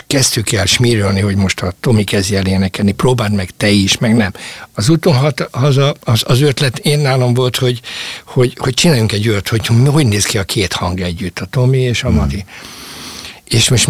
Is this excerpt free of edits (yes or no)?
no